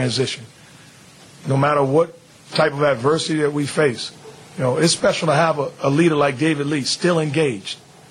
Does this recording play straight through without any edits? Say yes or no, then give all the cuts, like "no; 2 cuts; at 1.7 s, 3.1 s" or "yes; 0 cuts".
no; 1 cut; at 1.4 s